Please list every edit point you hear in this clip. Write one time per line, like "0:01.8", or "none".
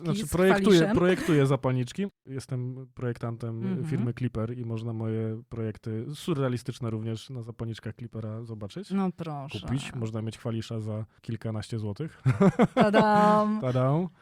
none